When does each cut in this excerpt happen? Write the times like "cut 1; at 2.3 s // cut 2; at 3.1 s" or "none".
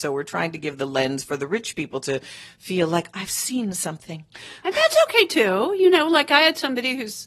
cut 1; at 3.1 s